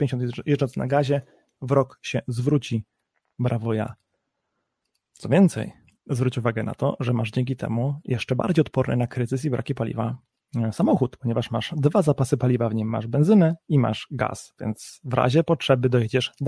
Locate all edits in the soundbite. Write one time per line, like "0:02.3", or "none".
none